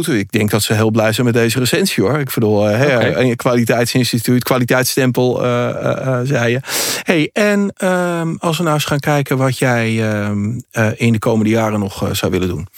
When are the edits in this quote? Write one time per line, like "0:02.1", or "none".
none